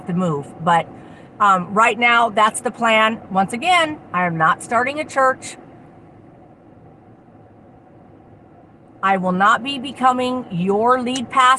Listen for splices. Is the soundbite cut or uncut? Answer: uncut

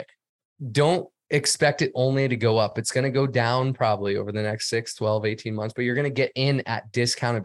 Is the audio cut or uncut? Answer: uncut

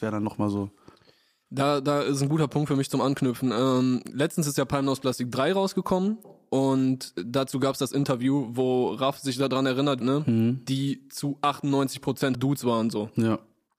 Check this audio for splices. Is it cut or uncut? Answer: cut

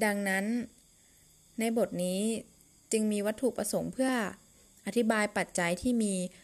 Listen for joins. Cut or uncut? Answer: uncut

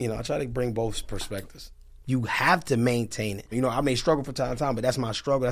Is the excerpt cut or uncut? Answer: cut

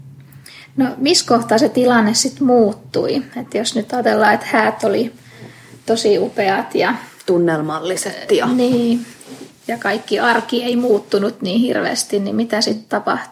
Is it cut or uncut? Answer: uncut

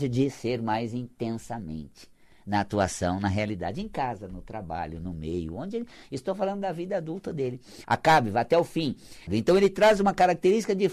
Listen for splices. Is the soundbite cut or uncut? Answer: cut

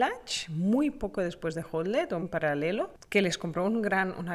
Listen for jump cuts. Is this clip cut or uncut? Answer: cut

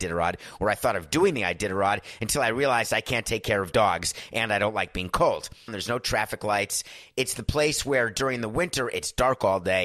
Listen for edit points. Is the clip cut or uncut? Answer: cut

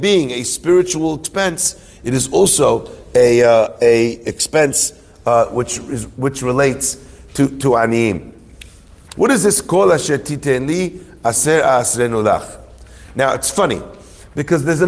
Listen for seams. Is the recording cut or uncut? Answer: cut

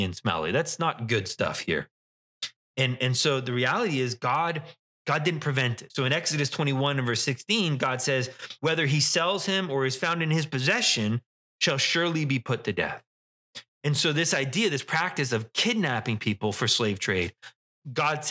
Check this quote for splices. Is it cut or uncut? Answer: cut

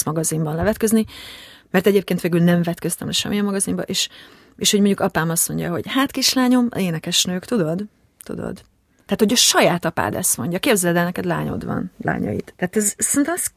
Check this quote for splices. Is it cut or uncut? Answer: uncut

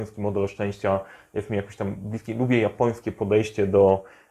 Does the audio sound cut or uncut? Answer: uncut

